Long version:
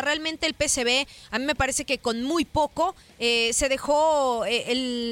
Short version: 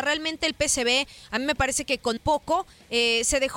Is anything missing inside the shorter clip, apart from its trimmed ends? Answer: yes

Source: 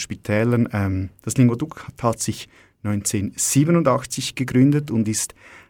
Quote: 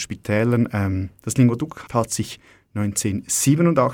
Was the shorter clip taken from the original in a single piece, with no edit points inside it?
no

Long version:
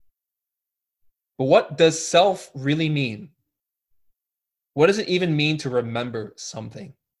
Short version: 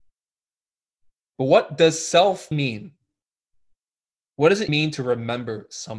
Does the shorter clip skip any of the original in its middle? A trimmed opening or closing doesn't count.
yes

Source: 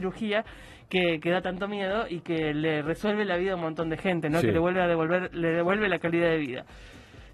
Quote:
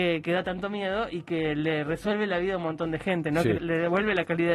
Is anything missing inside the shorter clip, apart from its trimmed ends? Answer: yes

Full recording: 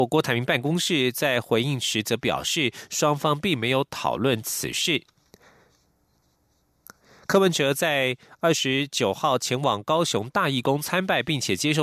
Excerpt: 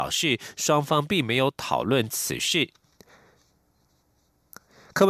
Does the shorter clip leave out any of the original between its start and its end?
no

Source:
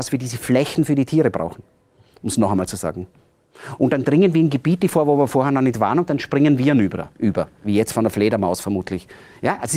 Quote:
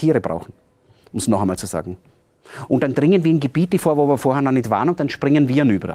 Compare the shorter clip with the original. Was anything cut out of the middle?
no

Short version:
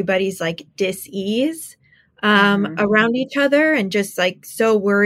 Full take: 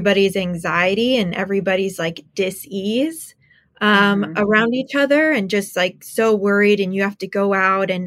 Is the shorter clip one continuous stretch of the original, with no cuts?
yes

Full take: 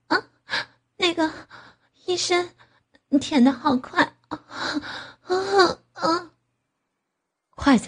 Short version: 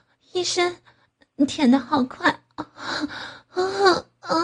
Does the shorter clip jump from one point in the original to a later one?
no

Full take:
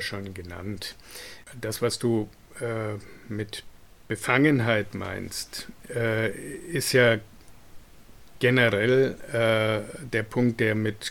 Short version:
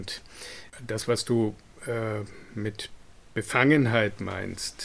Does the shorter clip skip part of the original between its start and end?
no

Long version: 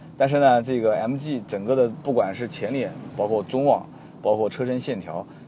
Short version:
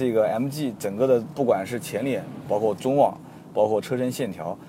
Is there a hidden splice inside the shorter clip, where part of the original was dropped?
no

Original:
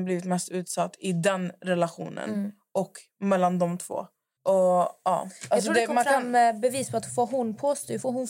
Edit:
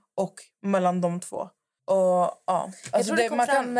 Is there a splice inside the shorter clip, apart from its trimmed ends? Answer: no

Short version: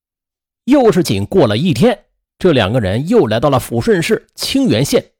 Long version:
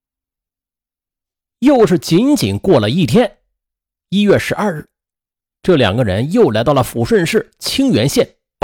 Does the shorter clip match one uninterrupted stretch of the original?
no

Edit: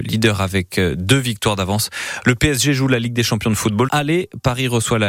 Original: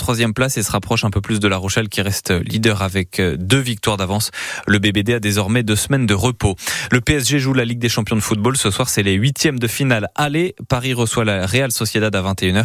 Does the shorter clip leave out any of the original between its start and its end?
yes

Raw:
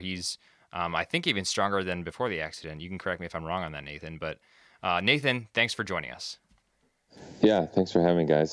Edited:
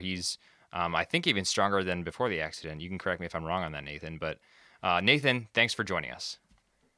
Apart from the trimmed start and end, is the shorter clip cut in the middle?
no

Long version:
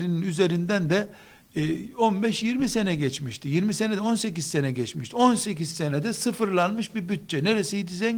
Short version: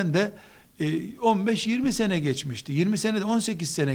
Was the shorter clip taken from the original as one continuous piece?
yes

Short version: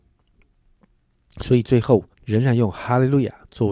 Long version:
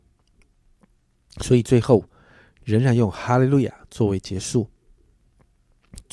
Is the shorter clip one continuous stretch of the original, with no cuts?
no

